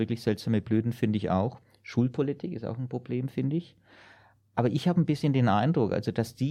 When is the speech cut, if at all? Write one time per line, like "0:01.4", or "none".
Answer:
none